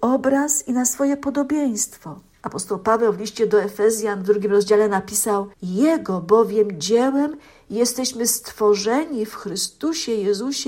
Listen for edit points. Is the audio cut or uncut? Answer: cut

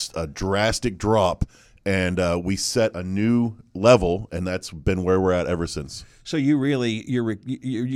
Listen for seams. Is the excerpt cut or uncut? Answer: uncut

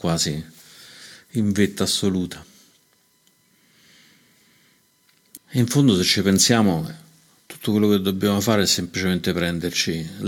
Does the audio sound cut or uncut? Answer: cut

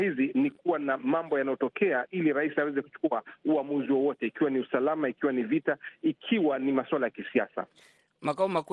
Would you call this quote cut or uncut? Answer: uncut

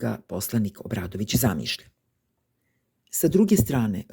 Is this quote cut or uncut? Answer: uncut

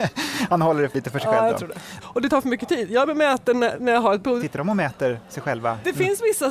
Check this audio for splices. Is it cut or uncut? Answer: cut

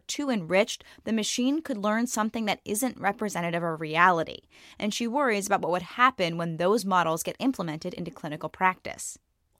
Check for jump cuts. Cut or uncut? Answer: uncut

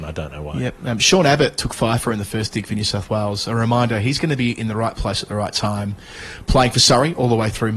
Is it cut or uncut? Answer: uncut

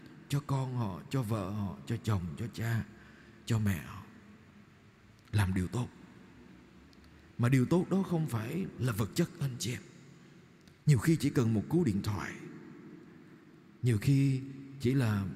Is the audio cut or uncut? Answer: uncut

